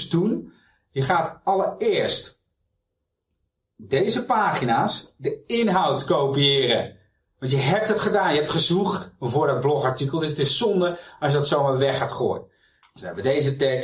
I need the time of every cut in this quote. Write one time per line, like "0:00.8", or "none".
0:12.8